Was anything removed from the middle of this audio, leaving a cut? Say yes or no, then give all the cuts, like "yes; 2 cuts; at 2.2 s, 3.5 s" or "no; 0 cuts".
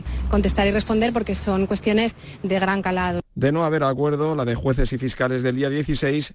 no; 0 cuts